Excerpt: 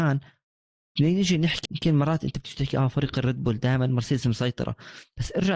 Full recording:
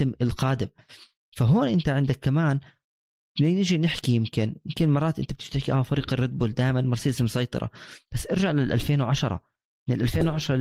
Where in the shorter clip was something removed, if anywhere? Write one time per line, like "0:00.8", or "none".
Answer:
0:01.7